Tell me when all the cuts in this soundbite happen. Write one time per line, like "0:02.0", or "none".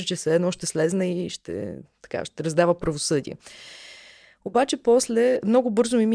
none